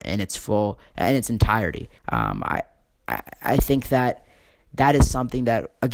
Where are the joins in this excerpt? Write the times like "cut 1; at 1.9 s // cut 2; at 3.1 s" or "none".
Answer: cut 1; at 2.0 s

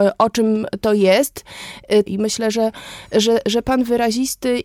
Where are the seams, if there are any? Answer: cut 1; at 2.1 s

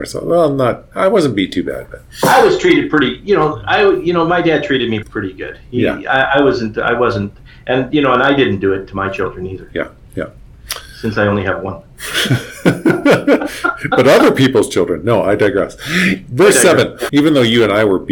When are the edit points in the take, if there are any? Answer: cut 1; at 5.0 s // cut 2; at 17.1 s

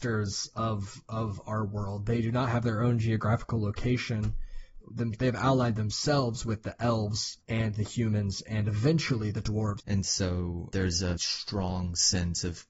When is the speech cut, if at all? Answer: cut 1; at 4.8 s // cut 2; at 9.8 s // cut 3; at 11.2 s

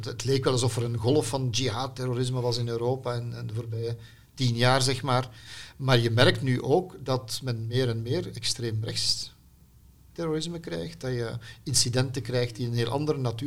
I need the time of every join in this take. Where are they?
none

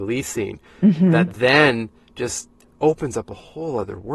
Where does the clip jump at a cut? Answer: cut 1; at 2.6 s

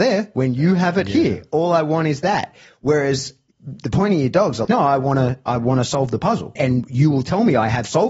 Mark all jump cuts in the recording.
cut 1; at 4.7 s // cut 2; at 6.6 s

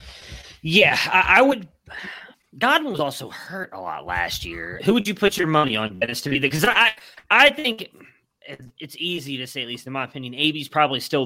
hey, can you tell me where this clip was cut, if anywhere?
cut 1; at 4.8 s

